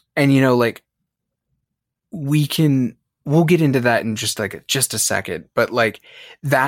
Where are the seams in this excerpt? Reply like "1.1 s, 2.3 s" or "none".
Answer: none